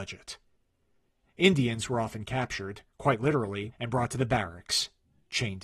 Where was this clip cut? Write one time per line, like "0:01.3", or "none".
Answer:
0:01.2
0:03.7